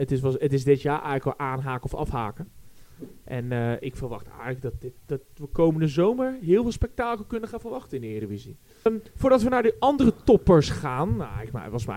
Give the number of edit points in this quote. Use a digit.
1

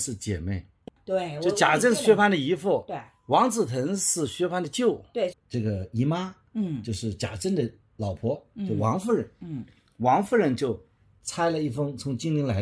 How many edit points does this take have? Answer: 1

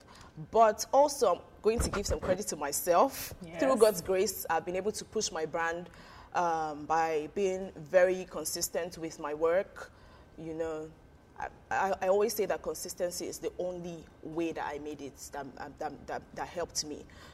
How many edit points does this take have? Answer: 0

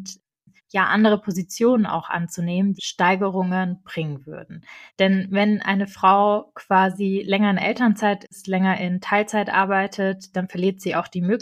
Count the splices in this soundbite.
2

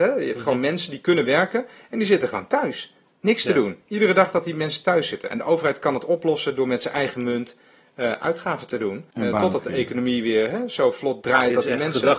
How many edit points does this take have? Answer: 2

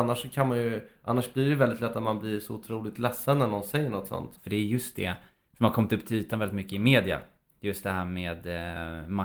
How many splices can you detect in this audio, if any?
1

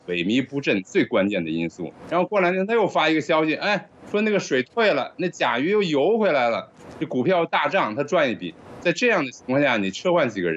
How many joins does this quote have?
2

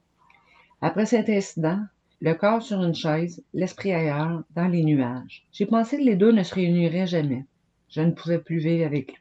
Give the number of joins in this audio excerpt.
3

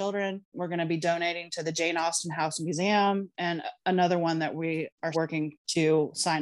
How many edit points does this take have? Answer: 1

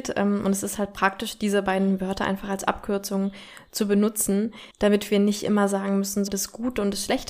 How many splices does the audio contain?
2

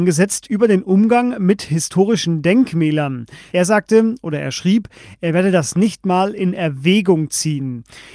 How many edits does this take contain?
1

